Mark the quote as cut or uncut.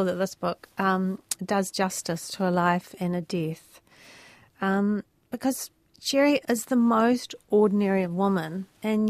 cut